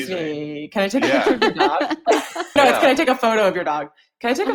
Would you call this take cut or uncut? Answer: cut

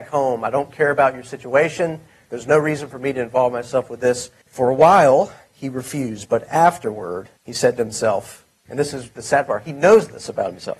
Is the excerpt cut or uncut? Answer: cut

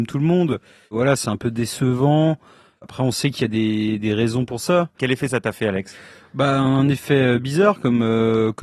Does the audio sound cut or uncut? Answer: cut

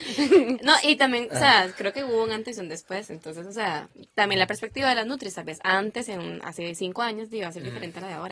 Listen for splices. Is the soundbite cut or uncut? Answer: uncut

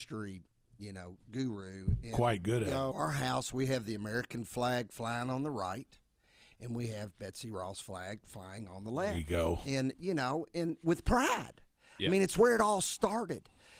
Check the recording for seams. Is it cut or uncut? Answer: cut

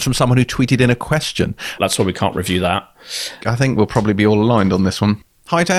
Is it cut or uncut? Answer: cut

